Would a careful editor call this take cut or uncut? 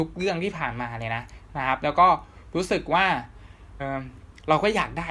cut